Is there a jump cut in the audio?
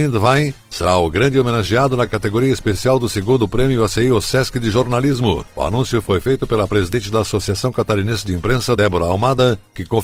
no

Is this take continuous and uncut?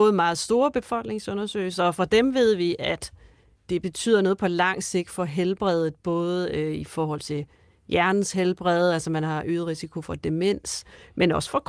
yes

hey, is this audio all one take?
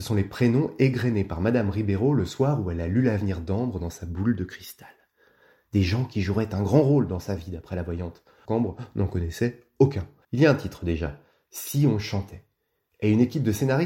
no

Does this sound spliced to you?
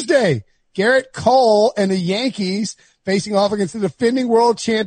no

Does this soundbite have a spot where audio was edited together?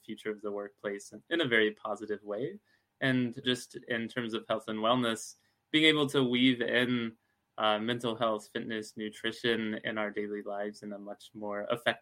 yes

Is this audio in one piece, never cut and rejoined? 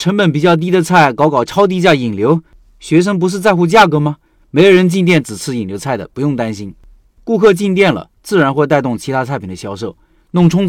yes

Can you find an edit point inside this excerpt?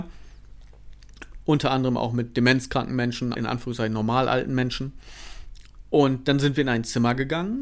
yes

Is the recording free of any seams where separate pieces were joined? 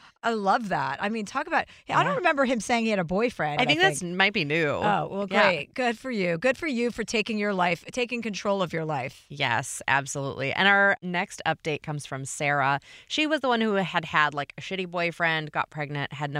no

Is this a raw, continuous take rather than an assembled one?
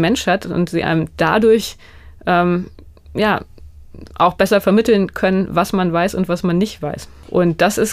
yes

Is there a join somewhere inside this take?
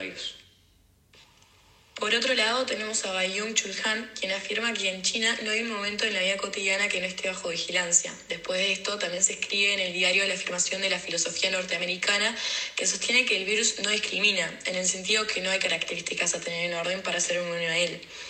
no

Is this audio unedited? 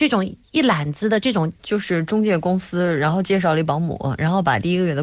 no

